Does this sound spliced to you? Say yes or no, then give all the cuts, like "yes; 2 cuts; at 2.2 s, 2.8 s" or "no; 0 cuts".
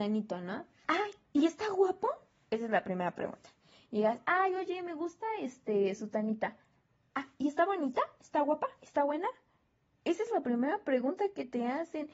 no; 0 cuts